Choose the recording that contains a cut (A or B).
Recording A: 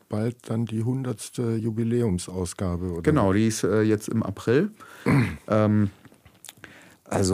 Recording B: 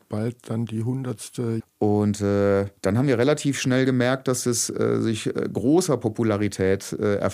B